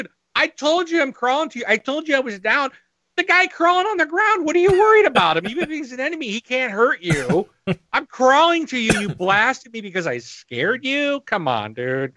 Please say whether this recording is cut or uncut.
uncut